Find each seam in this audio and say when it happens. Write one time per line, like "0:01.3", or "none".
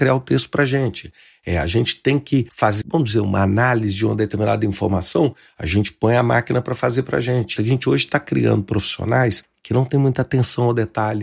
0:02.8
0:07.6